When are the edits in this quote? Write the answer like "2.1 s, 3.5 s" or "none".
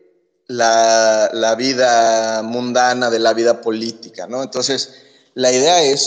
none